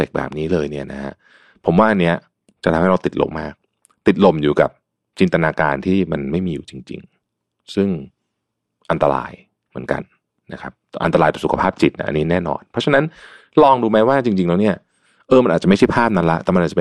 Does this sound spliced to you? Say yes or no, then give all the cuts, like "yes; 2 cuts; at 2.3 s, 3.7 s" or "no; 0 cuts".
yes; 1 cut; at 3.3 s